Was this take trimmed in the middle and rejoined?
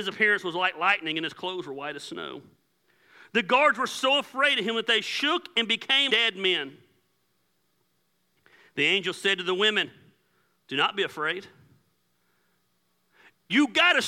yes; 1 cut; at 6.1 s

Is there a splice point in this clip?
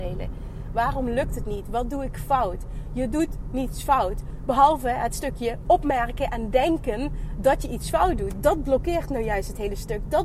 no; 0 cuts

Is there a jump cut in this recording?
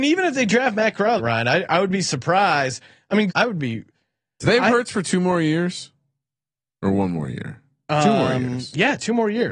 yes; 2 cuts; at 1.2 s, 3.3 s

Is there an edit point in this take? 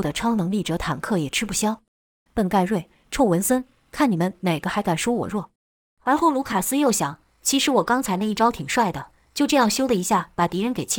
yes; 2 cuts; at 2.3 s, 5.6 s

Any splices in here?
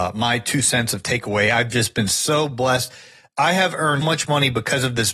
yes; 1 cut; at 4.0 s

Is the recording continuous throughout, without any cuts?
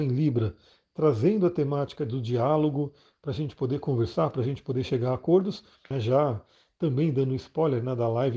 no; 1 cut; at 5.9 s

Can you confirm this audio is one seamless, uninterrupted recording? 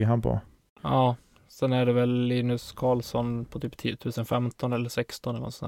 yes; 0 cuts

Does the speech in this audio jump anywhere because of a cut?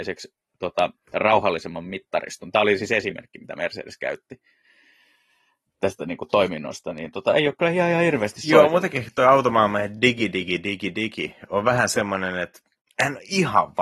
no; 0 cuts

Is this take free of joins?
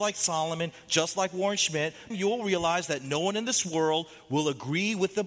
no; 1 cut; at 2.1 s

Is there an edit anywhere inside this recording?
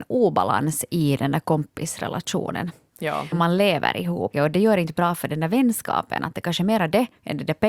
yes; 2 cuts; at 3.3 s, 4.3 s

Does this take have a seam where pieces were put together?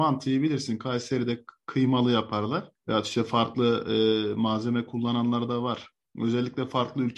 no; 0 cuts

